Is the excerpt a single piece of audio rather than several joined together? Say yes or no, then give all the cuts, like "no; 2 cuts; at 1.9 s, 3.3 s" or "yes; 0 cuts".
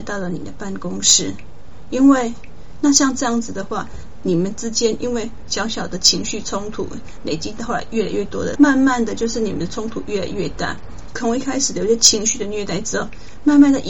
no; 3 cuts; at 2.8 s, 8.5 s, 11.1 s